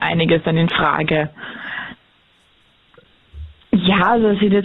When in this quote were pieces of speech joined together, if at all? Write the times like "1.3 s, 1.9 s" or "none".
3.6 s